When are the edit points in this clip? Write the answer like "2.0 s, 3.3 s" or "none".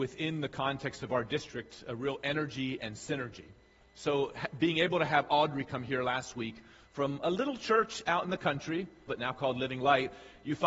3.8 s, 9.1 s